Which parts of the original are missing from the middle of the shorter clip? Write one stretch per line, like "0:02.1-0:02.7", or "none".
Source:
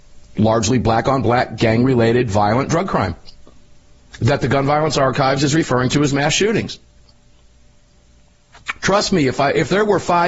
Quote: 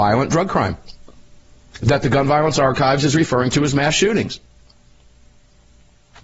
none